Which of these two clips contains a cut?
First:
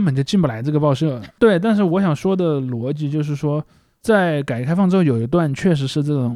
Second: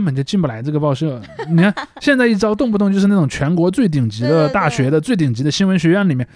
first; 1 cut; at 1.3 s

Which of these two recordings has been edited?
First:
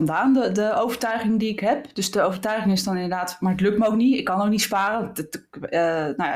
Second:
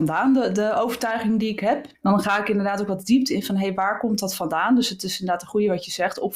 second; 1 cut; at 1.9 s

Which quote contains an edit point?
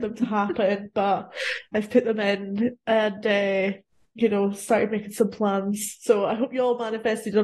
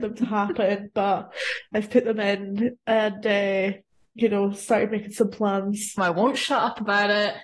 second; 1 cut; at 6.0 s

